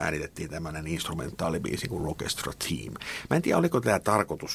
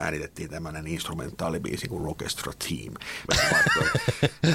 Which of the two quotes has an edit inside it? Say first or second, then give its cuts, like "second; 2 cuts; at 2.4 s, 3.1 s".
second; 1 cut; at 3.3 s